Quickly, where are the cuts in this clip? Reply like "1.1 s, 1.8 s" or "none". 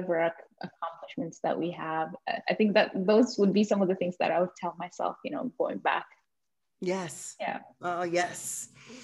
none